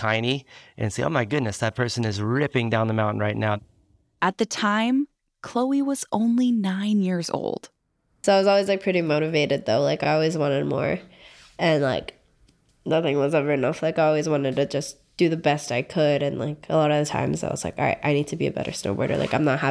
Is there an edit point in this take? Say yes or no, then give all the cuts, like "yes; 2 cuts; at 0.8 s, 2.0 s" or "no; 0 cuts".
no; 0 cuts